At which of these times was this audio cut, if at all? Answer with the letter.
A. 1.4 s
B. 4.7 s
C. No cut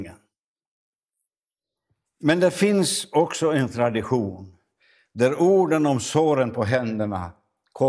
C